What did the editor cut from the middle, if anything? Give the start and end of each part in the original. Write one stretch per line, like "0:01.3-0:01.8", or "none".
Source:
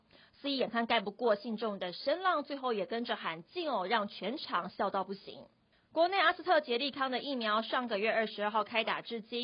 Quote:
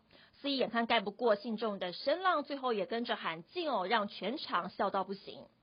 none